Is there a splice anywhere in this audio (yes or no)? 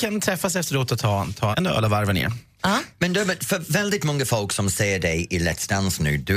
yes